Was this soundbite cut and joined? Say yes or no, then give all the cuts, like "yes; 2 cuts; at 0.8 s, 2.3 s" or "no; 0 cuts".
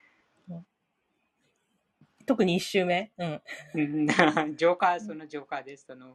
no; 0 cuts